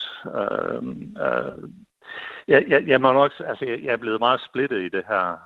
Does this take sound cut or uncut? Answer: uncut